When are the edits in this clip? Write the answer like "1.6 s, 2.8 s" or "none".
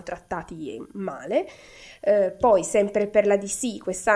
none